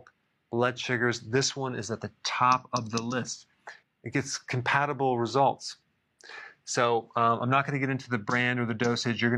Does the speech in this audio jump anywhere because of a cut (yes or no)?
yes